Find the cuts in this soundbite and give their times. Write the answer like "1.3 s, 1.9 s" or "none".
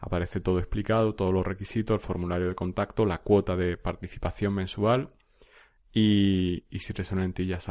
none